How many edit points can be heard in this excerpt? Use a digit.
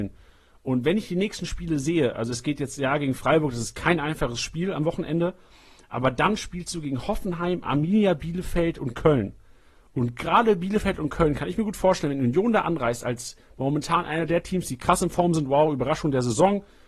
0